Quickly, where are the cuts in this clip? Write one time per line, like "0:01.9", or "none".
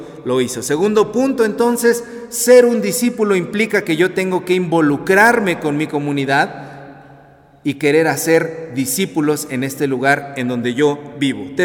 none